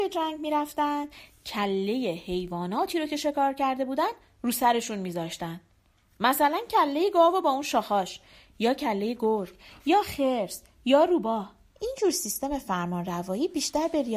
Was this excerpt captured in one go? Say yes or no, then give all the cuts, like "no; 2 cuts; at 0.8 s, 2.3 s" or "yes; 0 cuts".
no; 1 cut; at 11.7 s